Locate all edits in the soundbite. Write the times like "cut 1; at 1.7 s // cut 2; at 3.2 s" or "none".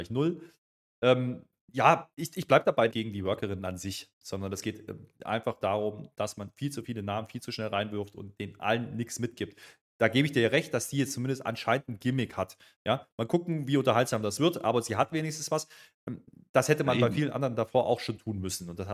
cut 1; at 2.9 s